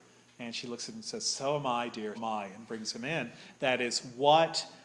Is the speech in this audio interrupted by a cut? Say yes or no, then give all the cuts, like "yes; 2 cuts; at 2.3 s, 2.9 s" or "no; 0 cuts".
yes; 2 cuts; at 2.1 s, 3.5 s